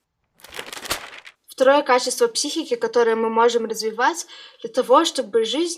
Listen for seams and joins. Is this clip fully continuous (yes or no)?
no